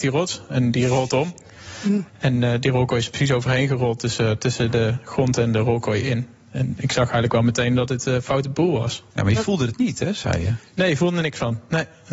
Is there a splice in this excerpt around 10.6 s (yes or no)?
no